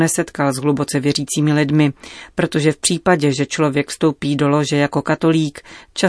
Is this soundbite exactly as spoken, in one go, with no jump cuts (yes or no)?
yes